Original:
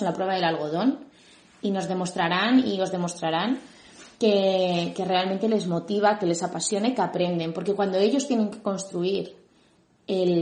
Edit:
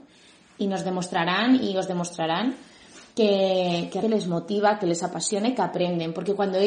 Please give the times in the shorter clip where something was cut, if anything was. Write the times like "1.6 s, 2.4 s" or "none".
4.0 s